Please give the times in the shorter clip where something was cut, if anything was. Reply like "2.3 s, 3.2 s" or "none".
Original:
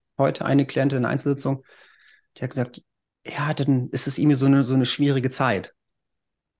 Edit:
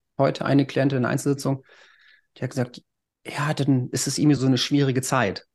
4.4 s

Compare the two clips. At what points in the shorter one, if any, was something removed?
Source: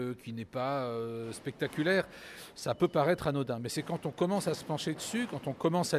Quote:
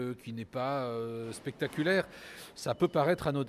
none

